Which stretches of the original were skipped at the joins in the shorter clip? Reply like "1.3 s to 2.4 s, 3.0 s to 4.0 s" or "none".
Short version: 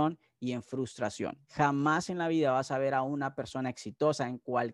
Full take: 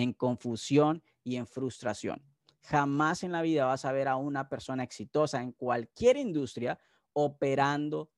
2.3 s to 2.6 s